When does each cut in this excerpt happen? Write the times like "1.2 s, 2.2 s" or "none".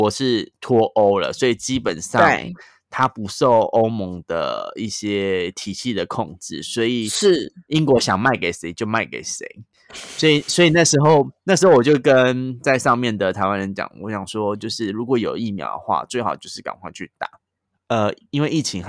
17.7 s